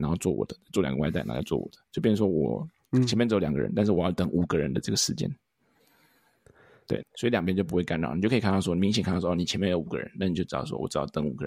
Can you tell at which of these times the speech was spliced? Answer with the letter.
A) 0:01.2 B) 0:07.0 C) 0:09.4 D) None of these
B